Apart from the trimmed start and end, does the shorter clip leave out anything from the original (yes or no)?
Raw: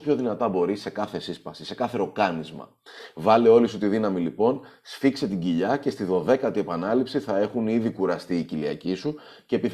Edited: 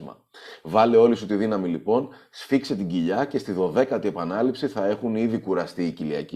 no